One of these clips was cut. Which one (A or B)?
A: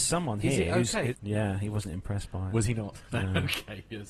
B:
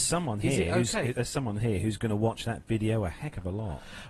A